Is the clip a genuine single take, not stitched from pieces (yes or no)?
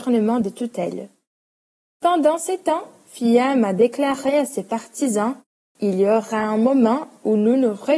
no